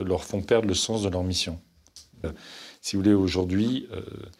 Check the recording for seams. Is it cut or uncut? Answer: cut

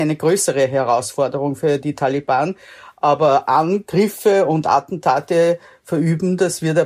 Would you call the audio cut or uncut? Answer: uncut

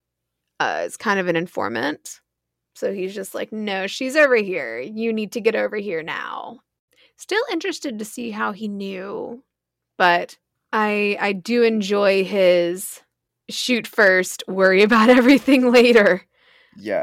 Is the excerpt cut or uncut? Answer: uncut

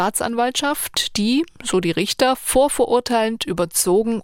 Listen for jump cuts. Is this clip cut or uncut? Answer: uncut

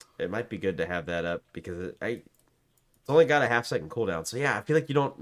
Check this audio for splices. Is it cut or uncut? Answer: uncut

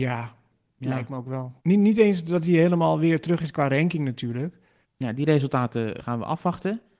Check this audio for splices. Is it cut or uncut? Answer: cut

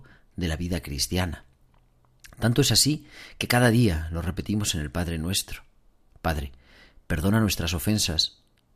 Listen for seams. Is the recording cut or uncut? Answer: uncut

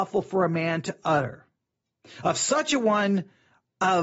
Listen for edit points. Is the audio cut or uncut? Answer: uncut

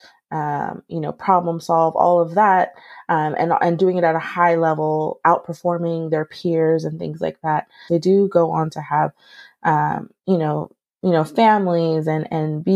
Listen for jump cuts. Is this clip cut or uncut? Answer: cut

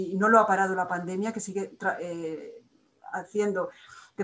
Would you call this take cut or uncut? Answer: uncut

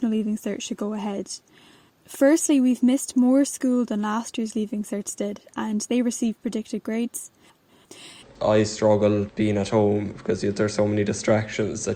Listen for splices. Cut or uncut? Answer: cut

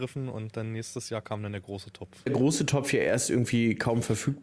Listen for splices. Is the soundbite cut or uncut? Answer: cut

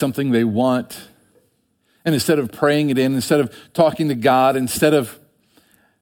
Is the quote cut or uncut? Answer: uncut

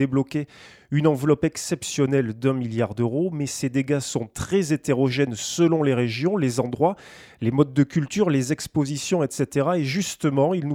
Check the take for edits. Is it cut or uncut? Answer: uncut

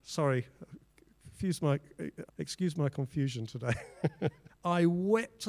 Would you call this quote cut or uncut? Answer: cut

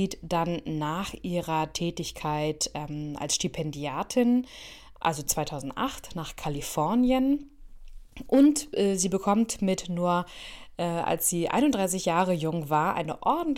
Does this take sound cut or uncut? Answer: uncut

